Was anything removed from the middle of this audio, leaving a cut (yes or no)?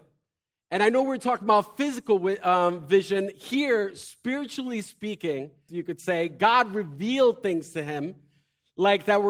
yes